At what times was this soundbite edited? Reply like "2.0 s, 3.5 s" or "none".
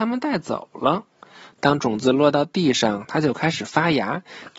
1.6 s